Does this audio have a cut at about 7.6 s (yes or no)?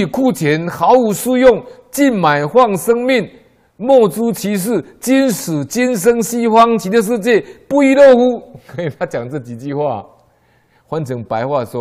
no